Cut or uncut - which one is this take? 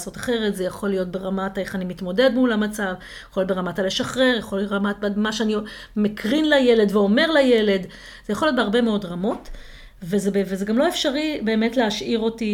uncut